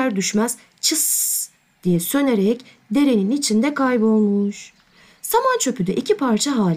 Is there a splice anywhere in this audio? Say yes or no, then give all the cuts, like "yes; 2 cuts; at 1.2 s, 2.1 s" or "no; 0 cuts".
no; 0 cuts